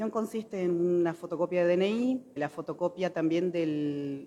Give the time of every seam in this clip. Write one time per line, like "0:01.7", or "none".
0:02.4